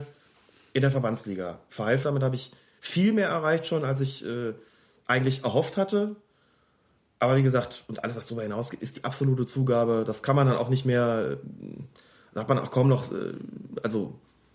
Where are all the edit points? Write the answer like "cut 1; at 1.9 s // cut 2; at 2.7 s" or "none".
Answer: cut 1; at 2.0 s